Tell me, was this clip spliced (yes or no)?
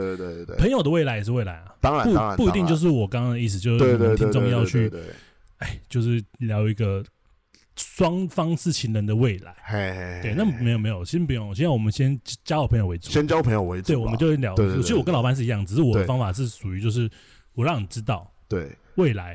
no